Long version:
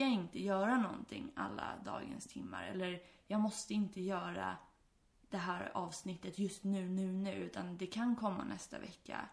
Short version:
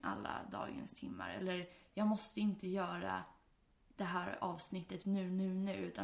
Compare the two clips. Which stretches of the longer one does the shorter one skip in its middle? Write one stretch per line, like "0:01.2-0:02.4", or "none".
0:06.4-0:06.6